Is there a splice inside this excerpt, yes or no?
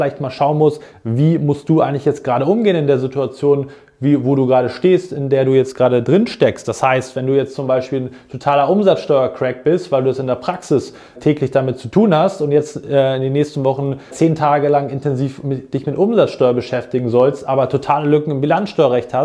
yes